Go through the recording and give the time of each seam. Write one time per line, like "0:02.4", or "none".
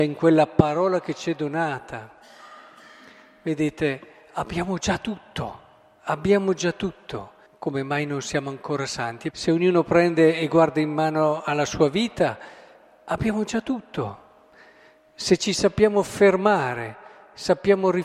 0:07.5
0:09.3